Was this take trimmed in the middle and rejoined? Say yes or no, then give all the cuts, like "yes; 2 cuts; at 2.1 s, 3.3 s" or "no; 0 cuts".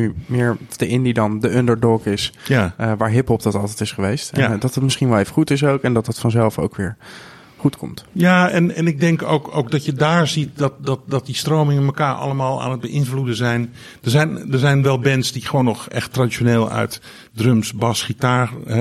no; 0 cuts